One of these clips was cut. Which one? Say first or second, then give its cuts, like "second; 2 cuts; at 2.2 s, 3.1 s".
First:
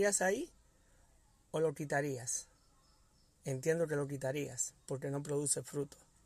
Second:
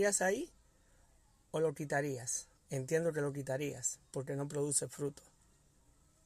second; 1 cut; at 2.6 s